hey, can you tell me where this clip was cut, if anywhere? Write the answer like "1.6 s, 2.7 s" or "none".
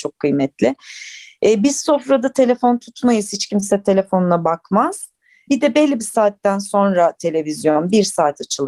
none